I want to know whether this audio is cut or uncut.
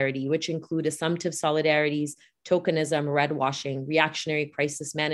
uncut